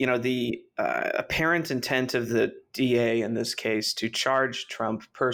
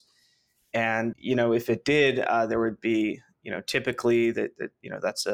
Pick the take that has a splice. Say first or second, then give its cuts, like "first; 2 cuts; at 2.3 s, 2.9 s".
second; 1 cut; at 1.1 s